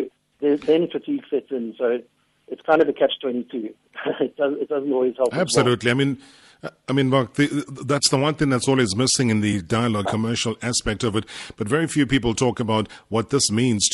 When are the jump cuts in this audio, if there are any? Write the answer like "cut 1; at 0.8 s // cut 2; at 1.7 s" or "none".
cut 1; at 10.0 s